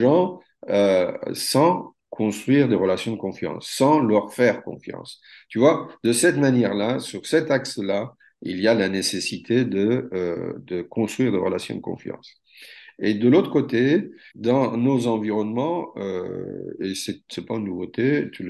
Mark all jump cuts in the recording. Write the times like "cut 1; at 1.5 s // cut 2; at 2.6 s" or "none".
cut 1; at 14.3 s